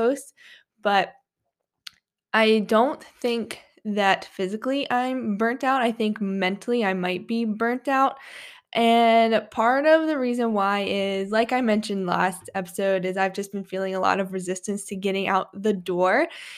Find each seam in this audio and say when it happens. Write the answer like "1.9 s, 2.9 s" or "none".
none